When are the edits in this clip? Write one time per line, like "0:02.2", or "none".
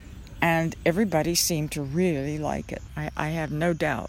0:02.9